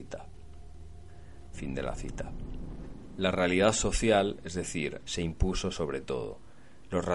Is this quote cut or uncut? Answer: cut